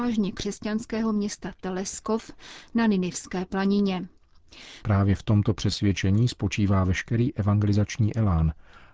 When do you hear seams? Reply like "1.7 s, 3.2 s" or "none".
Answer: 4.8 s